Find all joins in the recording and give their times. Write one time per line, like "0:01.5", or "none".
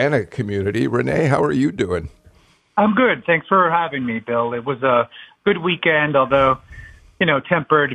none